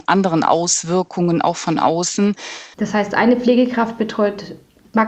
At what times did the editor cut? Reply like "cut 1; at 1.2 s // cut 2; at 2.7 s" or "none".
cut 1; at 2.7 s